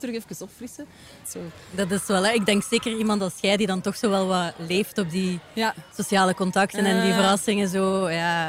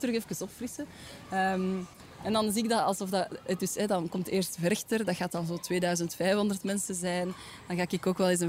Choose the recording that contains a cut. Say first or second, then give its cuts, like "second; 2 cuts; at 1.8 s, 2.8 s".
first; 1 cut; at 1.2 s